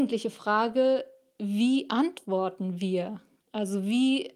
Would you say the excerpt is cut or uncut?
uncut